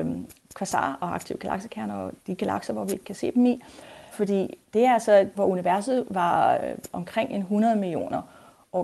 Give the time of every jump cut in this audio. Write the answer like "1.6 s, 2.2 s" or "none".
4.1 s, 5.3 s